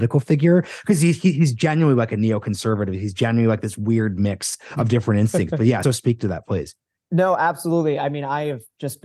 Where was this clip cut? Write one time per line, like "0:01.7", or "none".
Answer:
0:05.8

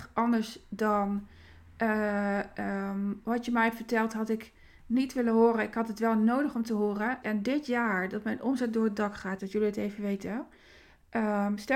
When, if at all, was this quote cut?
0:07.2
0:09.4

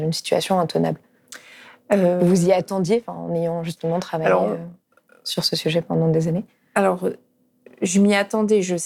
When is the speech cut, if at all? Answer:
none

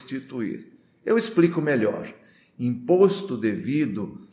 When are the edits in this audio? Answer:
none

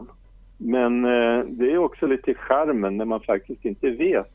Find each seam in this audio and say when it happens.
none

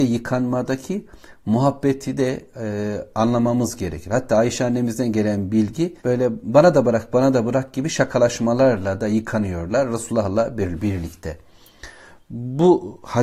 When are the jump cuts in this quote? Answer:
0:06.0

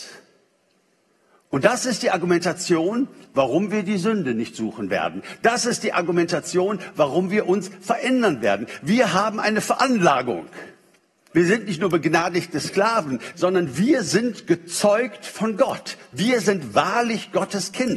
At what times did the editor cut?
0:11.3
0:13.3

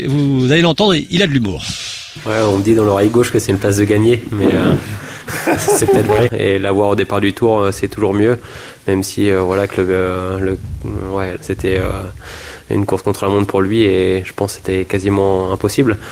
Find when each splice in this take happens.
0:06.3
0:11.4

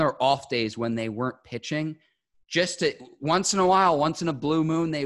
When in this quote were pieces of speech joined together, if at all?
none

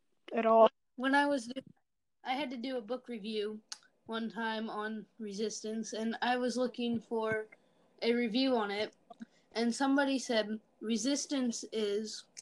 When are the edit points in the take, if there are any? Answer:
none

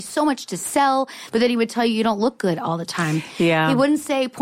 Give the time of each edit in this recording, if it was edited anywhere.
0:01.3

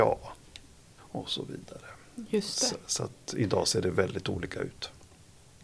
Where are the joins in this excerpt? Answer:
0:01.0

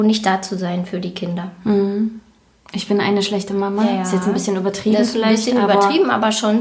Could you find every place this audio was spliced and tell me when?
none

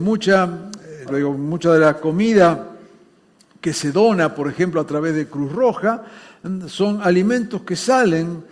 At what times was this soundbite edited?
0:01.1

